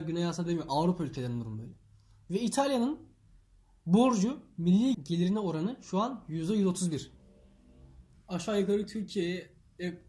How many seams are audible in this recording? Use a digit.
2